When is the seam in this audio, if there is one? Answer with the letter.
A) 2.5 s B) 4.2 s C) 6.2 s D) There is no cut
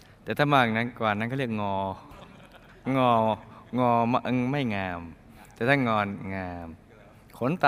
D